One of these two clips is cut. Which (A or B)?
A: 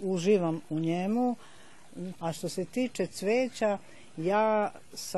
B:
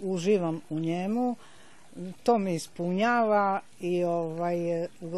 A